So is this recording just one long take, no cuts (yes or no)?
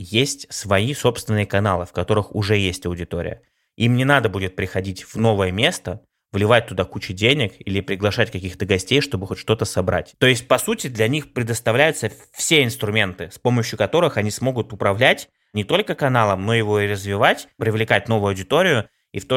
no